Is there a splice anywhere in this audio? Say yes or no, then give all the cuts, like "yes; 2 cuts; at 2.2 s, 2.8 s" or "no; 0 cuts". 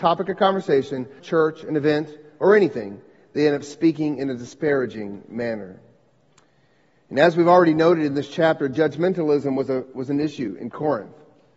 yes; 1 cut; at 1.2 s